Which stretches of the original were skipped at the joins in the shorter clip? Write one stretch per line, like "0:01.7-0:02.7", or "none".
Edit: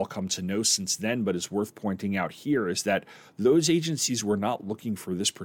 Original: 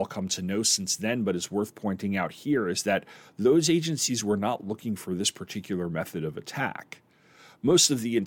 none